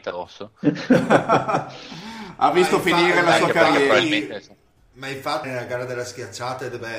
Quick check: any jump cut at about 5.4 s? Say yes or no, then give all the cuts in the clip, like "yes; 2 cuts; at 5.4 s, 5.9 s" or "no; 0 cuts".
yes; 1 cut; at 5.4 s